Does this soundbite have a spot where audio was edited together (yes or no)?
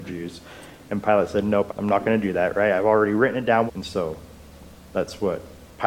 yes